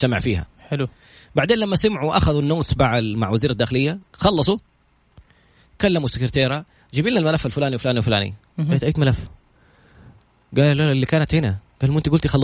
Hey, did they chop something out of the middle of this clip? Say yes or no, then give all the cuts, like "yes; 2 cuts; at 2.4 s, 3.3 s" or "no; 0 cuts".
no; 0 cuts